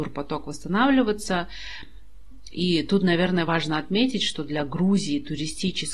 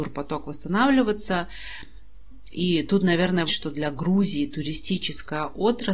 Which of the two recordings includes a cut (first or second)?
second